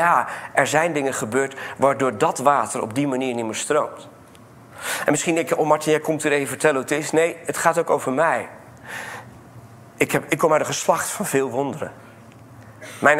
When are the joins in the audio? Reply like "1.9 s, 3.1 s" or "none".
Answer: none